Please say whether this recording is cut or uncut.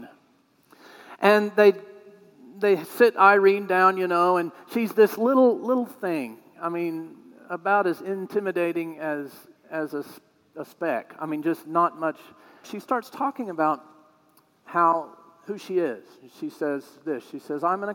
cut